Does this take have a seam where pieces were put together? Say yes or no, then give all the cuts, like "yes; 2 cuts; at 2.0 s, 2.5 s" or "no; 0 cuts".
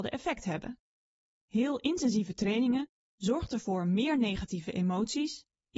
no; 0 cuts